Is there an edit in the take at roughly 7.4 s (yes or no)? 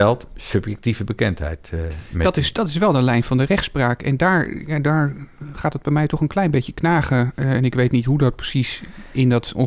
no